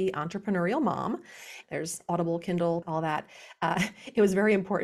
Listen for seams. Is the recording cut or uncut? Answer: cut